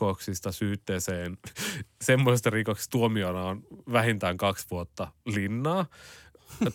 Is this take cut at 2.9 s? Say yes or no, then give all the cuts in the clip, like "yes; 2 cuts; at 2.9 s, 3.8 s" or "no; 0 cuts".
yes; 1 cut; at 2.9 s